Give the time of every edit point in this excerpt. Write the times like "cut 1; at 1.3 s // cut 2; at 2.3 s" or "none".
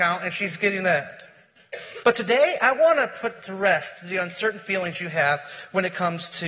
cut 1; at 2.0 s